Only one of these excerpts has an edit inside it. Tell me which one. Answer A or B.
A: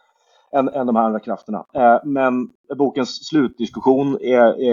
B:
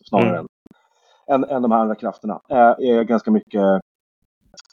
B